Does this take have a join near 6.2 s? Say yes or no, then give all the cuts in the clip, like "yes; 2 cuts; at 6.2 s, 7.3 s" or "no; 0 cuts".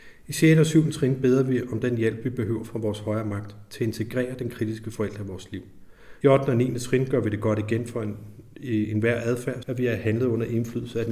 yes; 2 cuts; at 6.2 s, 9.6 s